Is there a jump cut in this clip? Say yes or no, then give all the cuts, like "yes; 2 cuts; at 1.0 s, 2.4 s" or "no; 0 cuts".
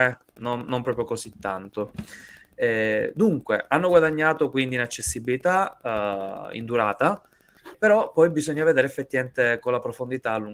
yes; 1 cut; at 7.7 s